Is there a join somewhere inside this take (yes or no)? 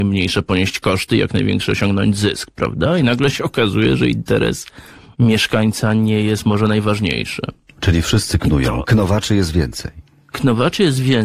no